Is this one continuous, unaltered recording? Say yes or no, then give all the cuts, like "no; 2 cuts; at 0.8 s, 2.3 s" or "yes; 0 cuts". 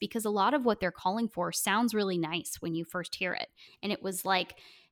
no; 1 cut; at 3.7 s